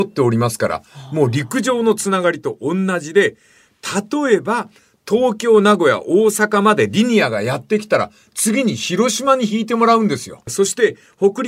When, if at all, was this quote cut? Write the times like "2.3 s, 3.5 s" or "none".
10.4 s